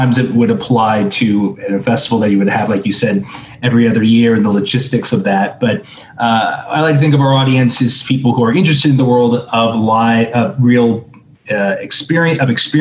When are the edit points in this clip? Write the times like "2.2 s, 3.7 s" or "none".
none

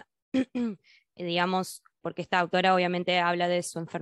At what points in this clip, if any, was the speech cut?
2.0 s

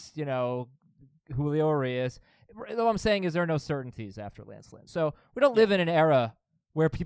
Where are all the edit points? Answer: none

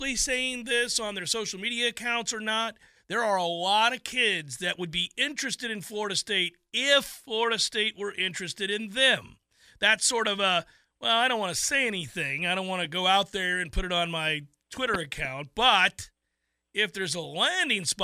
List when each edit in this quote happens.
none

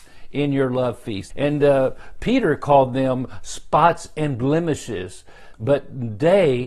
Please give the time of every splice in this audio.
1.3 s, 5.5 s

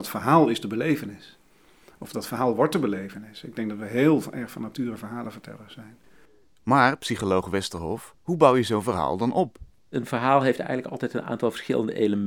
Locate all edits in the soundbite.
8.2 s

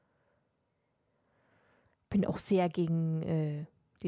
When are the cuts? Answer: none

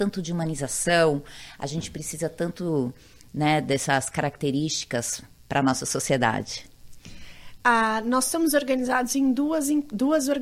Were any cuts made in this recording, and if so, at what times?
none

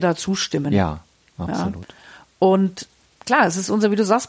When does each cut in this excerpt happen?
none

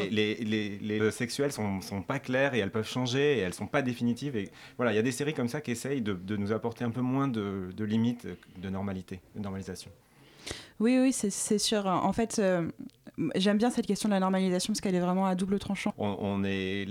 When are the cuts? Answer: 1.0 s, 15.9 s

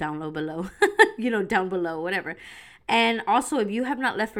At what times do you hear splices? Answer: none

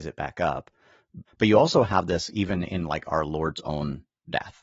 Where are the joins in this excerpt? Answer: 1.3 s

